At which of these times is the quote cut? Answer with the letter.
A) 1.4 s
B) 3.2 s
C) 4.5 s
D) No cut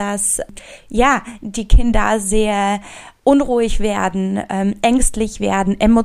B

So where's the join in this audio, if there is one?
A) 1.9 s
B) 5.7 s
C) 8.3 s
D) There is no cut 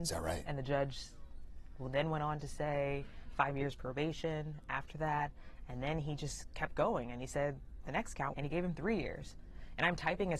C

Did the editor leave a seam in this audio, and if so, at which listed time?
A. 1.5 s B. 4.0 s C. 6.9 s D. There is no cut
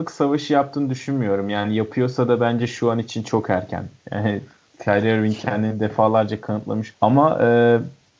C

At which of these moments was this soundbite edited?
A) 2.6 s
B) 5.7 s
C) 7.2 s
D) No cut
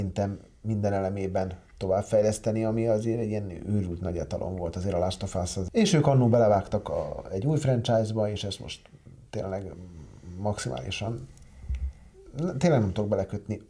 B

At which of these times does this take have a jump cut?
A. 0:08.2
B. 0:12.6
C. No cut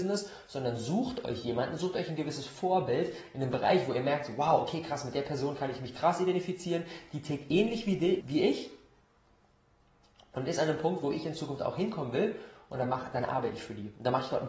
A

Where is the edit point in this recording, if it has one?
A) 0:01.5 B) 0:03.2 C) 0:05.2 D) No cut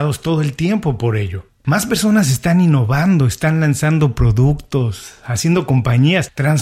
A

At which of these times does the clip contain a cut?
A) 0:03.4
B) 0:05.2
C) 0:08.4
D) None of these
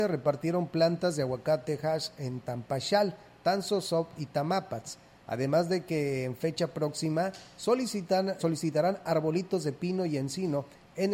C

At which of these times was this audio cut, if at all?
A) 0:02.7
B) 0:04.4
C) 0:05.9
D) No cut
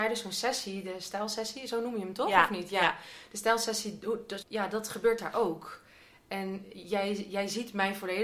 B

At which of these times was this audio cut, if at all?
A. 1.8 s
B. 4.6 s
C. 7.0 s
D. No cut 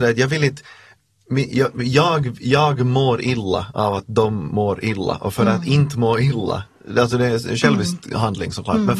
D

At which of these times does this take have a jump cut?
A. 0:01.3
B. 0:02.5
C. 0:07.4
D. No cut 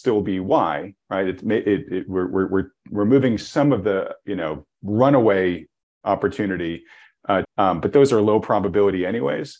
C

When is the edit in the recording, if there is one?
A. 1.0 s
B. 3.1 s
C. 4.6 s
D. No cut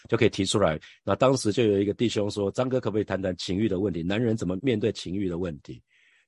C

